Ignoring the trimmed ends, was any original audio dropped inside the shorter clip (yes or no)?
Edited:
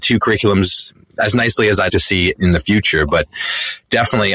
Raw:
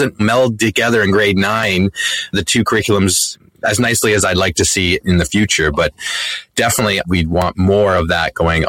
yes